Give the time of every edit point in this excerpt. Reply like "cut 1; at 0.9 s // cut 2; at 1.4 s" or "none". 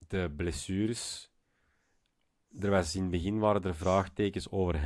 none